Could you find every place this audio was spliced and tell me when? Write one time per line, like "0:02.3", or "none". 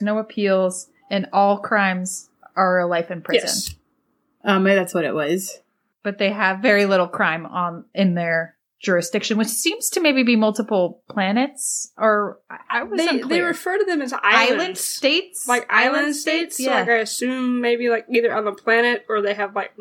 none